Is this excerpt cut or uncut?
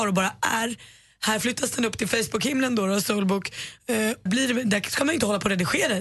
cut